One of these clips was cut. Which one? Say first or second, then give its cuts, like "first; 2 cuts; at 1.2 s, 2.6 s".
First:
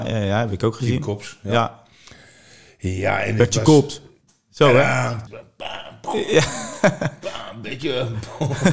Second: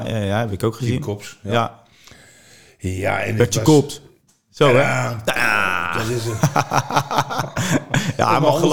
first; 1 cut; at 5.3 s